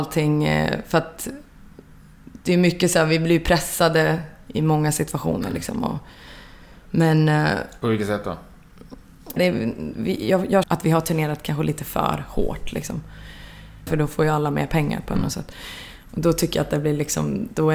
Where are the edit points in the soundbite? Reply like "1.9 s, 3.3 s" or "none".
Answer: 9.4 s, 10.6 s, 13.9 s